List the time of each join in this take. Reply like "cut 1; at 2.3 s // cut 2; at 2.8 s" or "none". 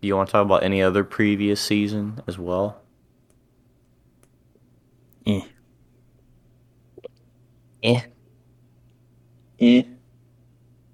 none